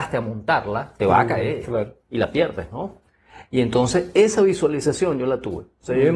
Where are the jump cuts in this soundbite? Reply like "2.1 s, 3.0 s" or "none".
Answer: none